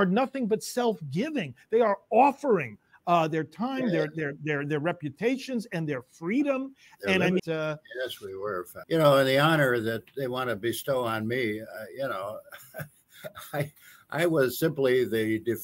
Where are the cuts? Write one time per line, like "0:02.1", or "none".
0:07.4
0:08.8